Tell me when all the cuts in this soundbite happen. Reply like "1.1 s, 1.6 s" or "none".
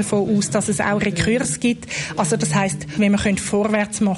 3.0 s